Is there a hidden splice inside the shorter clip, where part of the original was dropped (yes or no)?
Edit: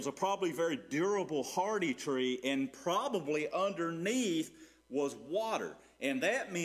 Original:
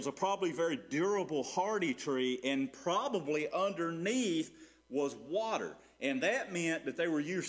no